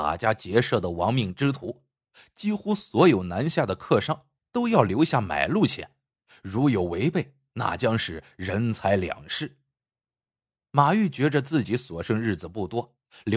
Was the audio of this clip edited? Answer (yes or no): no